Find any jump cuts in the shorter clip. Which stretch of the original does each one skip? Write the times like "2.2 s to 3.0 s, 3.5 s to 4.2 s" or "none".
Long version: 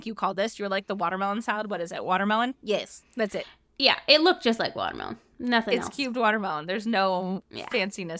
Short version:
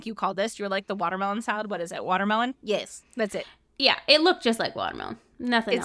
none